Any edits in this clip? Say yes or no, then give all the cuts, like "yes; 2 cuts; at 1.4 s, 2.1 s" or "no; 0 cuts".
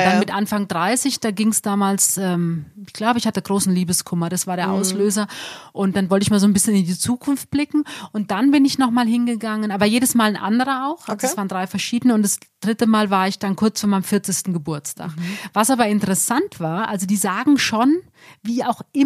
no; 0 cuts